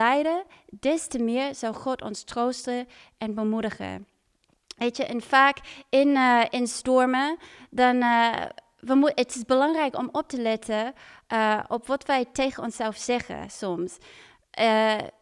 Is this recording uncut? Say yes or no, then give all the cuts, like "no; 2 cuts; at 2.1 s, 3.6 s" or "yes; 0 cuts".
no; 1 cut; at 11.7 s